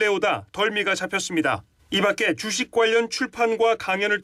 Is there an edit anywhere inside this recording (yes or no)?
yes